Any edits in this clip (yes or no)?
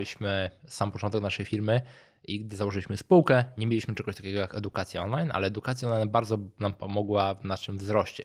no